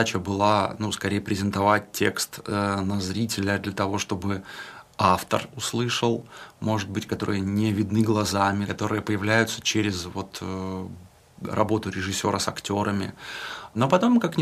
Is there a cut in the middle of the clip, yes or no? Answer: yes